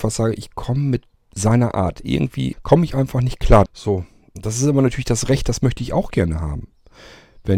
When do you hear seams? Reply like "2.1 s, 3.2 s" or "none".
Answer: 2.5 s, 3.7 s